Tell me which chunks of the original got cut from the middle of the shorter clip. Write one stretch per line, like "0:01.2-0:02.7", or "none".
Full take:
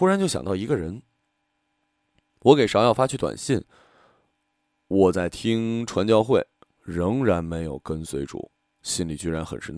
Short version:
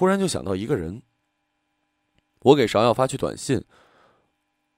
none